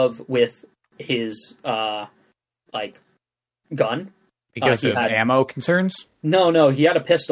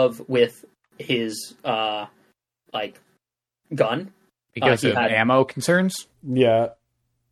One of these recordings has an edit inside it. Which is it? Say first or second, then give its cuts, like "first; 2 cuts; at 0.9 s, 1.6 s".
second; 1 cut; at 6.1 s